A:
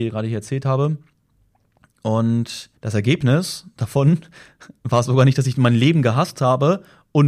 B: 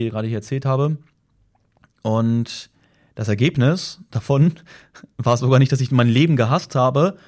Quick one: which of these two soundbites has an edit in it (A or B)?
A